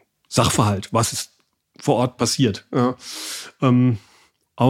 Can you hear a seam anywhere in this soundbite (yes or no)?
no